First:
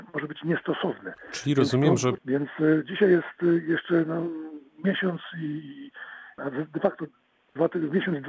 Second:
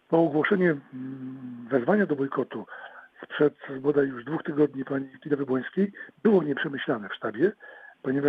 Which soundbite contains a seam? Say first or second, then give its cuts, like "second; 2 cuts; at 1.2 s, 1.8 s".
first; 2 cuts; at 2.2 s, 6.4 s